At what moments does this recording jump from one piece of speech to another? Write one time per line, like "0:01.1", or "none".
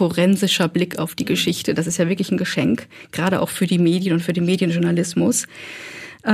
none